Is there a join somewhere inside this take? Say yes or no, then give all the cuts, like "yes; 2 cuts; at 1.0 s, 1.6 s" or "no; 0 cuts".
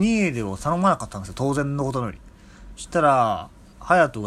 no; 0 cuts